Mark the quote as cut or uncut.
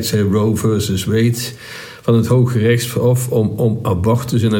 uncut